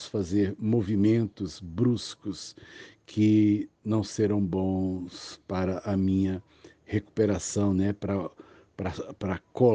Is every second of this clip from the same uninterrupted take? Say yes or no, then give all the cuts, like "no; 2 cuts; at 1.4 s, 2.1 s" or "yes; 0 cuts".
yes; 0 cuts